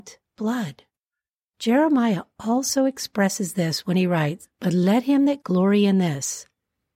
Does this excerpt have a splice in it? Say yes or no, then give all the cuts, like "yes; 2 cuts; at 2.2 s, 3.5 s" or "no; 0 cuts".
yes; 2 cuts; at 1.5 s, 5.4 s